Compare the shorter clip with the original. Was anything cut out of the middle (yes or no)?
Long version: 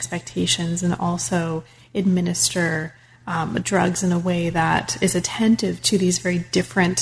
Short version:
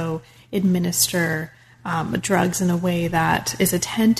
no